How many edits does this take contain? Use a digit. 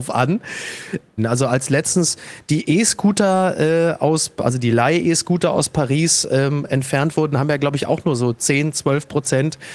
1